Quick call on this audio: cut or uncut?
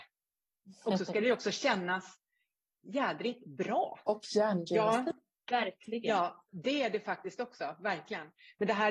cut